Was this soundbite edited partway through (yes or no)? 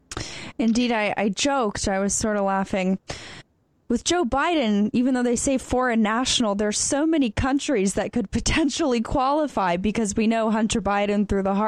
no